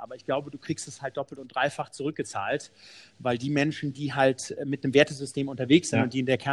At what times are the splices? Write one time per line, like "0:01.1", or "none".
none

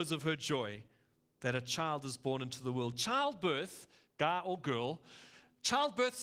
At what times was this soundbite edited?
0:04.1

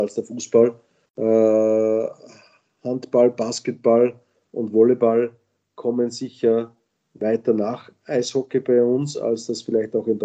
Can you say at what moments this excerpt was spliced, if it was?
0:01.0

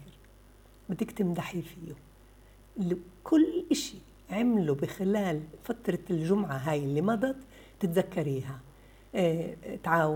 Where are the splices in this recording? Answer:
none

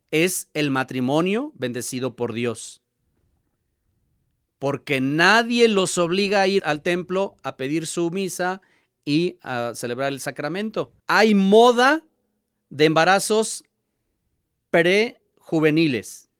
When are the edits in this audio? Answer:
0:06.6
0:11.0

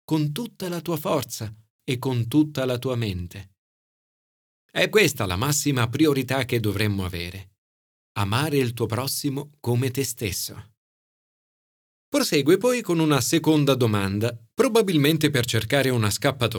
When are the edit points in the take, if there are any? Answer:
0:04.9
0:07.9

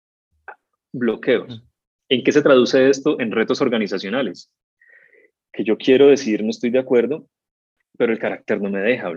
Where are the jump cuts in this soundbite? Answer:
0:02.0

